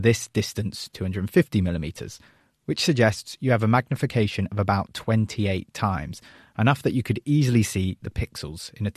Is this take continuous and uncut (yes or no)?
yes